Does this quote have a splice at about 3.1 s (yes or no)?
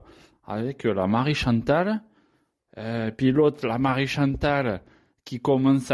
no